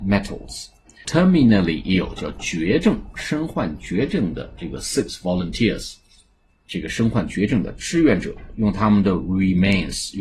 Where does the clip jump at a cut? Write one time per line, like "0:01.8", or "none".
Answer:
0:01.0
0:06.5

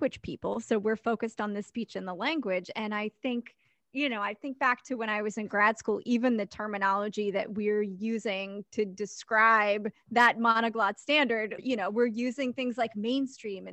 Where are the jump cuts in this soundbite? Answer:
0:11.6

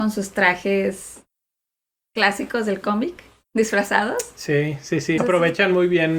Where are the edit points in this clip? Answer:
0:05.2

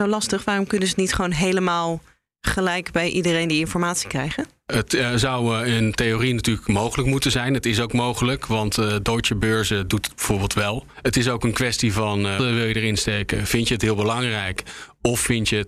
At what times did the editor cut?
0:10.9
0:12.4

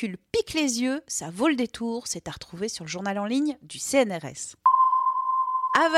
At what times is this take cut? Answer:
none

